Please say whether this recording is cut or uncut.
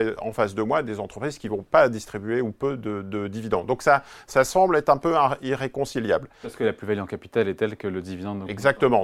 cut